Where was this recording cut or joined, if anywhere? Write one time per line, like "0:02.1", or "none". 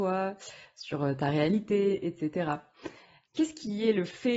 0:03.3